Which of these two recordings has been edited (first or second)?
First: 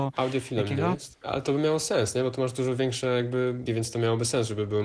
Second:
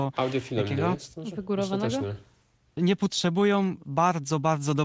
first